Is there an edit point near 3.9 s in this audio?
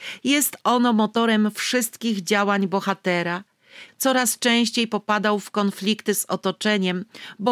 yes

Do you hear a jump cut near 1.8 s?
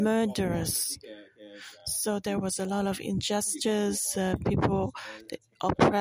no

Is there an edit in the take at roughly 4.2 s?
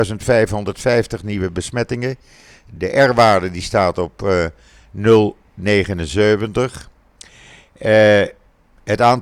no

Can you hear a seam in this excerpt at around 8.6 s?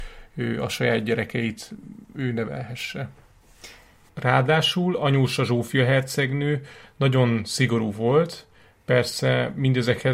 no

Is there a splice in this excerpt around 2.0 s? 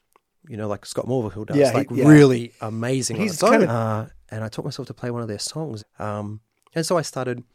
no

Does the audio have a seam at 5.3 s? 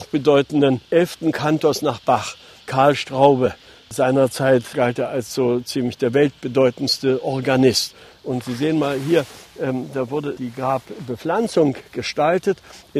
no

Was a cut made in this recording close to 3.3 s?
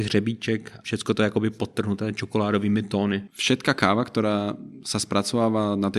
no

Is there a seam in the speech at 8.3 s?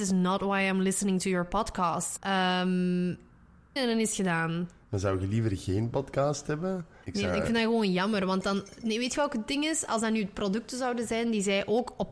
no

